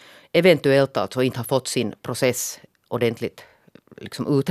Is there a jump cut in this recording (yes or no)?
no